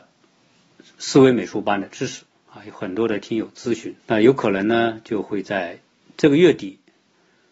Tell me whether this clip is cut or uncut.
cut